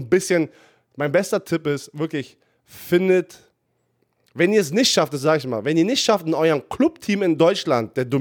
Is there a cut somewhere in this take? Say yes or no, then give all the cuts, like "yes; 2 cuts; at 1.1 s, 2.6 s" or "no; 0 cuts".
no; 0 cuts